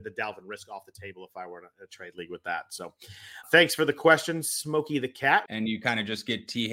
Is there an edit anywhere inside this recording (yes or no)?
yes